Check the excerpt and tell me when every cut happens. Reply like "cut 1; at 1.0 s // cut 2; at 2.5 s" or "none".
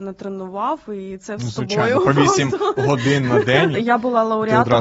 cut 1; at 3.7 s

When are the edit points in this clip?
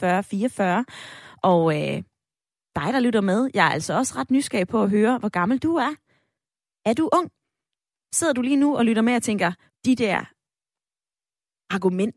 cut 1; at 9.7 s

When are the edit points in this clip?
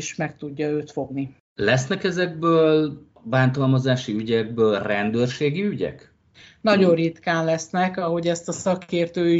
none

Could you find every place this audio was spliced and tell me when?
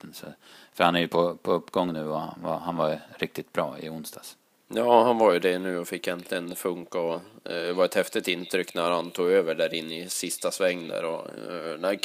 none

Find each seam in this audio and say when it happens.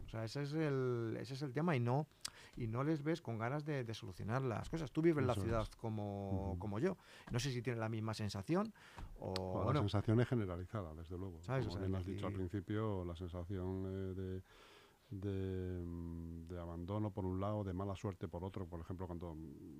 cut 1; at 3.2 s

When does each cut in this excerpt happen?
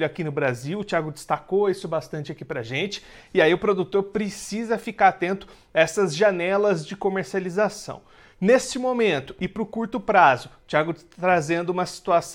none

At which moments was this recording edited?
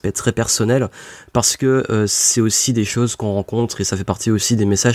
none

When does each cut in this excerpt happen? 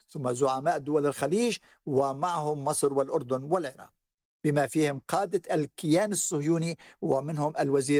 cut 1; at 4.3 s

